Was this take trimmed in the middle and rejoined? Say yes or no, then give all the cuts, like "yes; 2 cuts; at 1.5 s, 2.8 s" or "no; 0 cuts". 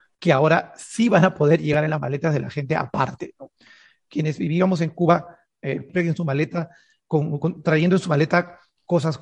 no; 0 cuts